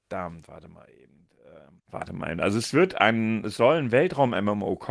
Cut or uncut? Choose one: cut